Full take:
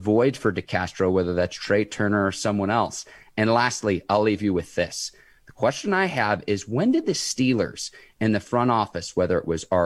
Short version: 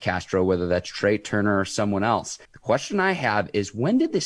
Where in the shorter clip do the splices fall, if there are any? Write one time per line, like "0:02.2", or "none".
0:02.4

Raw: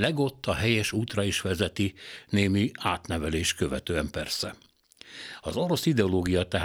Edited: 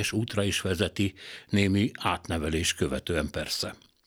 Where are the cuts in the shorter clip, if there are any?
none

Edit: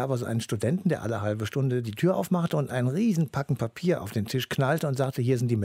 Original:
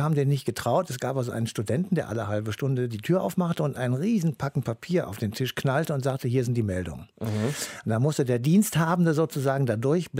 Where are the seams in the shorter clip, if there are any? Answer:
none

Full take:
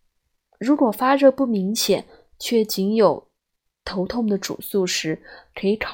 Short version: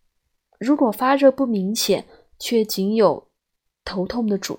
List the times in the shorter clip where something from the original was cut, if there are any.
none

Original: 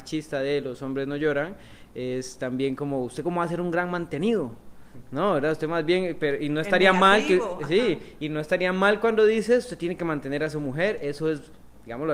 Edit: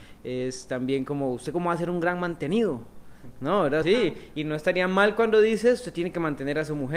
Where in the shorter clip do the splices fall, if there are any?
0:03.8

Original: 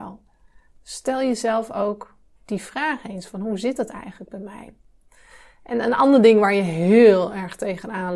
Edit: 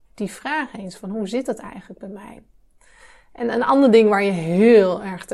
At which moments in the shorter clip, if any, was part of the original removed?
none

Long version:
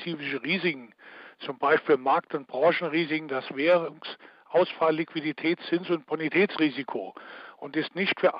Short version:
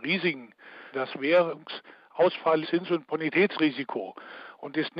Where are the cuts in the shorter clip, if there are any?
0:00.9
0:02.6

